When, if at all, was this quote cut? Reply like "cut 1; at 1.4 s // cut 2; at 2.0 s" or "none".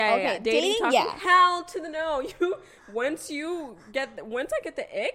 none